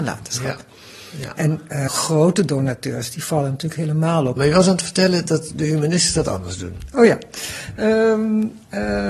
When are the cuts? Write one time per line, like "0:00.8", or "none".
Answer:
0:01.9
0:04.4